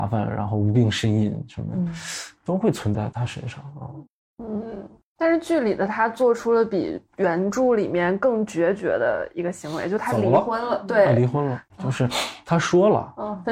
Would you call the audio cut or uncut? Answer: cut